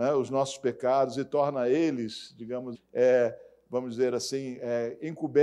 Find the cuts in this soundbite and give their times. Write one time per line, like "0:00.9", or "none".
0:02.7